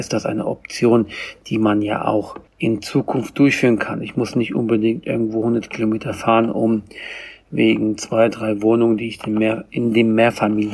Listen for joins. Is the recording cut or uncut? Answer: cut